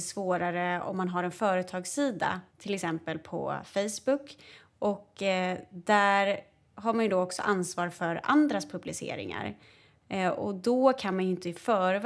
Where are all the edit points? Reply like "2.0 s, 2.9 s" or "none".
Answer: 2.5 s